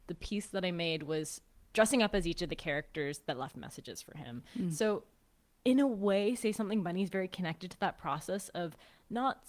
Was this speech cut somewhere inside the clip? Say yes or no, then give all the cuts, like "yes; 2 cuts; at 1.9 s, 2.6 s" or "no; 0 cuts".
no; 0 cuts